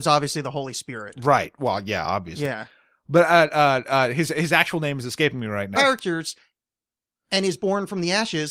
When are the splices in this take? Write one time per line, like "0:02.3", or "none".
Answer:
0:05.8

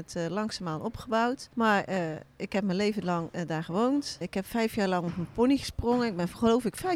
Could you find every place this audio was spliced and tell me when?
0:01.5
0:04.2

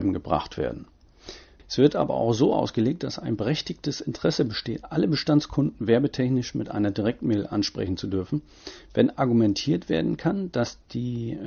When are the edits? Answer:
0:01.6

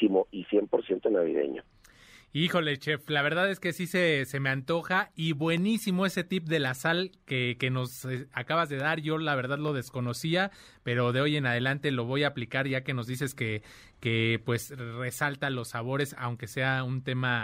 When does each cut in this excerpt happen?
none

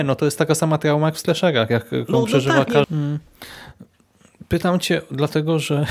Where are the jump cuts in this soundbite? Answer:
0:02.8

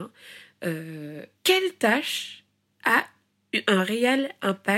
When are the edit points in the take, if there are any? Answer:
0:01.3

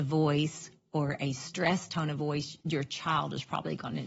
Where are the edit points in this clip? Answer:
0:02.6

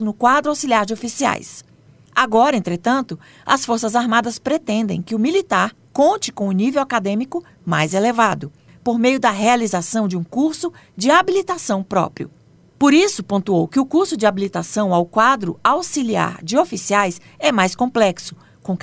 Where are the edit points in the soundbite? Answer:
none

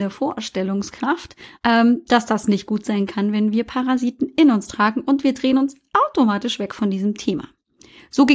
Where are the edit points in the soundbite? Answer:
none

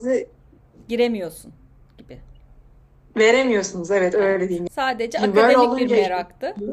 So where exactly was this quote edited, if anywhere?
0:04.7

